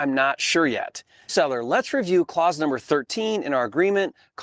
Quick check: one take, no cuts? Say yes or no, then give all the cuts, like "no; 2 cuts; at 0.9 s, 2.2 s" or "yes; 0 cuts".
no; 1 cut; at 1.3 s